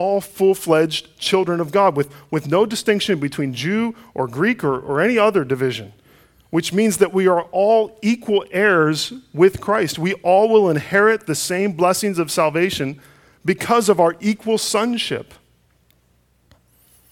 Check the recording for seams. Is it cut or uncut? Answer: uncut